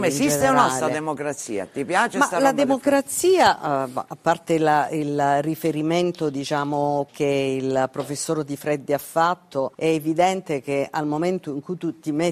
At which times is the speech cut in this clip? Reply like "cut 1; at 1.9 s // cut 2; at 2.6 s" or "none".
cut 1; at 7.1 s // cut 2; at 9.7 s